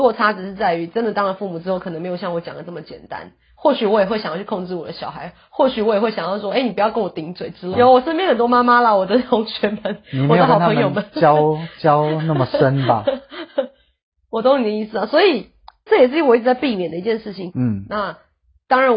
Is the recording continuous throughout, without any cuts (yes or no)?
no